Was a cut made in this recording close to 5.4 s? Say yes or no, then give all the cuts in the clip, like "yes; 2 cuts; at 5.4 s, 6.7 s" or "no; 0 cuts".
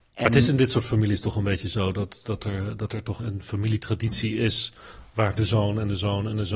no; 1 cut; at 3.2 s